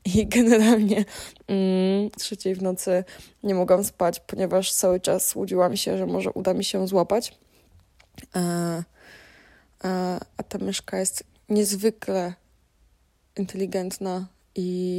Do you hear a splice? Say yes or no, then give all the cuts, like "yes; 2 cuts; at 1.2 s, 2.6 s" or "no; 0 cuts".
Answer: yes; 1 cut; at 2.2 s